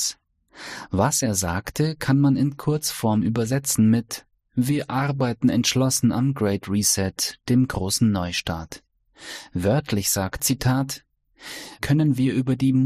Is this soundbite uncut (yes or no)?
no